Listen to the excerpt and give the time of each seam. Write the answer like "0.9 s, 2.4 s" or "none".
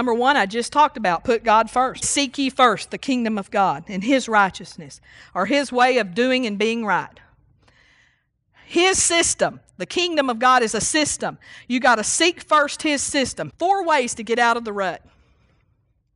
2.0 s, 13.5 s